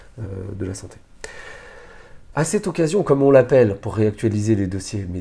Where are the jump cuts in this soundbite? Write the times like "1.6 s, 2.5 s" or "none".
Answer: 2.3 s